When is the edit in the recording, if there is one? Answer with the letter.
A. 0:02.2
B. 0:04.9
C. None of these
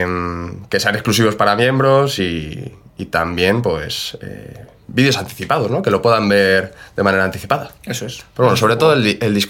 C